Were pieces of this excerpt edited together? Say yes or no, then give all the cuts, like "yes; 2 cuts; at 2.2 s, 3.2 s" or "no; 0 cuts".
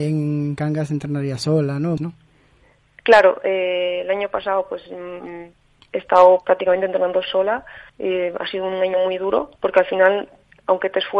yes; 3 cuts; at 2.0 s, 7.9 s, 9.6 s